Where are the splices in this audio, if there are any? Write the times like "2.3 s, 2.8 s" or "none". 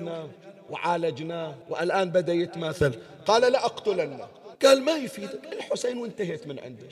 1.6 s, 4.6 s